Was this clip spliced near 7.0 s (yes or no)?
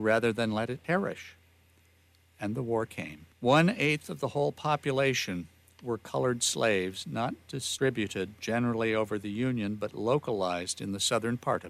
no